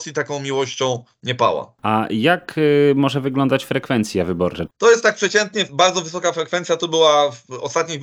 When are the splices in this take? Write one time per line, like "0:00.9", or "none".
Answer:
0:04.7